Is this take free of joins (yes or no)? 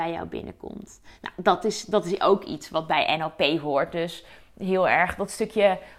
yes